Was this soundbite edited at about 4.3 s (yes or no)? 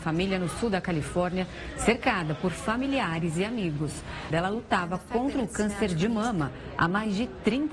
yes